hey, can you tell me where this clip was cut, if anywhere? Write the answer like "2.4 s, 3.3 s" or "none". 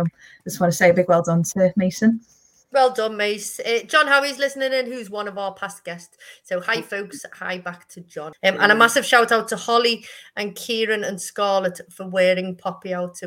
8.3 s

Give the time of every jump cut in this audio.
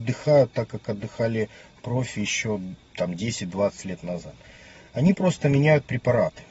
none

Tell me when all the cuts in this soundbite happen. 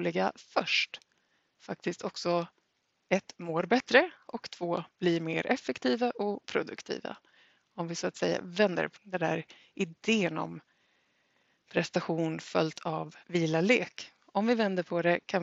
9.0 s, 13.2 s

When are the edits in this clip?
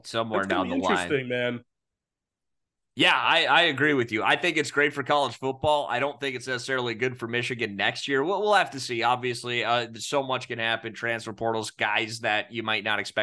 none

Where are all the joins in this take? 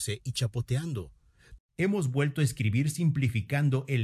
1.6 s

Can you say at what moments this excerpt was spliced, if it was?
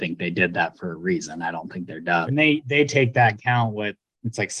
2.3 s

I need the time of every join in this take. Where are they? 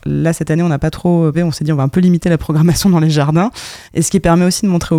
1.3 s, 3.9 s

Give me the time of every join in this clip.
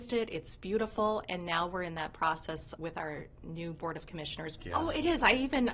2.8 s, 4.6 s

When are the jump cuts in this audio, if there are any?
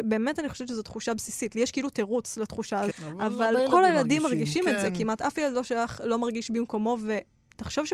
2.9 s

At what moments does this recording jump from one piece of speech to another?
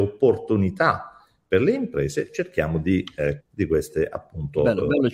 3.4 s

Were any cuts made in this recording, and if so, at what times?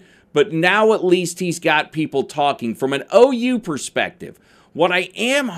none

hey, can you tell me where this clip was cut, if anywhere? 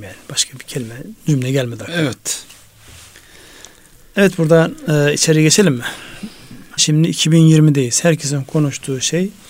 6.8 s

